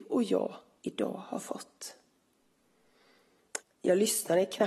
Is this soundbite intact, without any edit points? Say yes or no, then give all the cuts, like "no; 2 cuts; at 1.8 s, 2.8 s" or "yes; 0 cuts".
no; 1 cut; at 3.6 s